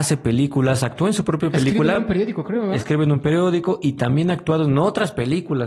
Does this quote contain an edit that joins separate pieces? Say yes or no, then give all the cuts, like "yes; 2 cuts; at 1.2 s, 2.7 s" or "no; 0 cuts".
no; 0 cuts